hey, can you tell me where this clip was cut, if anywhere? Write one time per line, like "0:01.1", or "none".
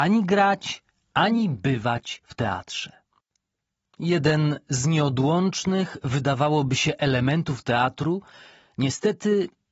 0:03.8